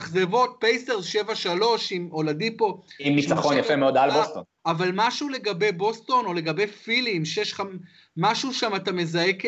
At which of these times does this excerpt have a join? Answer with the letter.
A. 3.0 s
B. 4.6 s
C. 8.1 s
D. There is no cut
B